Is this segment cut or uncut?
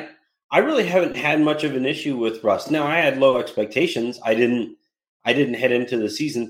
uncut